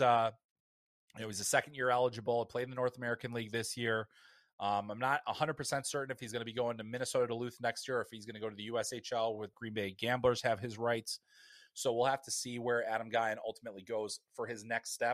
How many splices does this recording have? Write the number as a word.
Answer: one